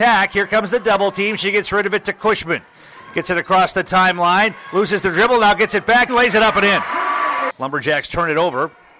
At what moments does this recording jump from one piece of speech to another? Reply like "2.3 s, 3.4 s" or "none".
6.1 s, 7.5 s